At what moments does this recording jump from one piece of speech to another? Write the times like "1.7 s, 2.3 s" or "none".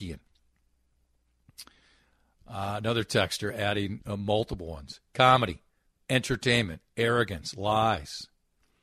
2.3 s

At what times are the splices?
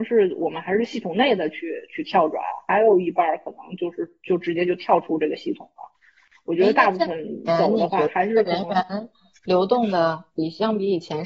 none

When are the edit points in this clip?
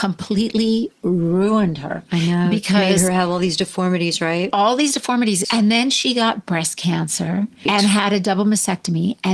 5.4 s, 7.7 s

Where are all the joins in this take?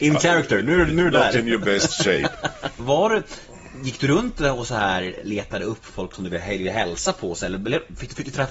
2.8 s

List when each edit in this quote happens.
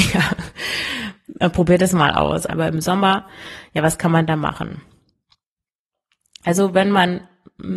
2.5 s

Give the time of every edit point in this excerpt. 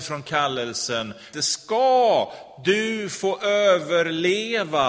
1.3 s

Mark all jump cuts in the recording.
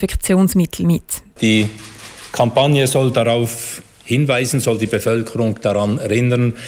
1.4 s

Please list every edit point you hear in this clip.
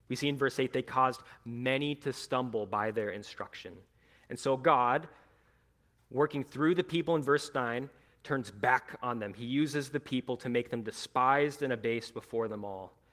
none

